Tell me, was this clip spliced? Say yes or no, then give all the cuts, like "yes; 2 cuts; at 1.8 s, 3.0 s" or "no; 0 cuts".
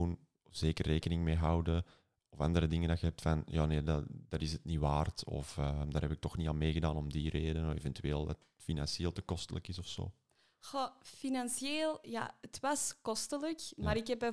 no; 0 cuts